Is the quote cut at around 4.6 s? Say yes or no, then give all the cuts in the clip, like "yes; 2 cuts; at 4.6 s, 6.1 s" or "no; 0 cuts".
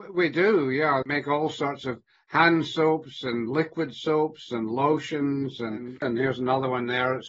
no; 2 cuts; at 1.0 s, 6.0 s